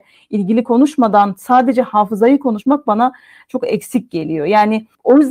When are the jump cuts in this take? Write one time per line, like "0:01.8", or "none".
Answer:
none